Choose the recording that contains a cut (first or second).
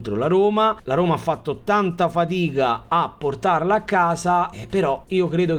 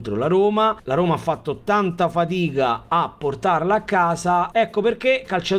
second